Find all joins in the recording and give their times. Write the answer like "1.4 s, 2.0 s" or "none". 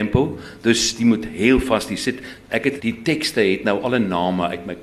2.8 s